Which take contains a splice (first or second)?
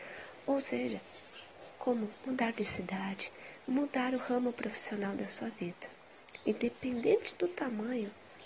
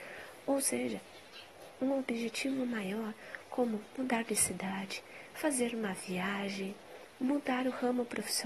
first